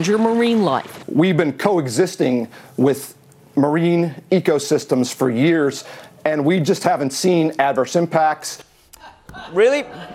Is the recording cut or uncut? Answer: cut